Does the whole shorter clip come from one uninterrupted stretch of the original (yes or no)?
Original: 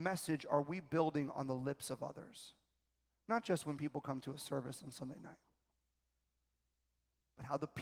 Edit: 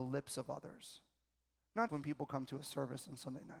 no